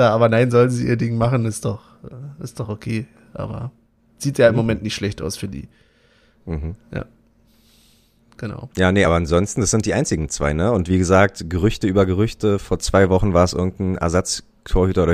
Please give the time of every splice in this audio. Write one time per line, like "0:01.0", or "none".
none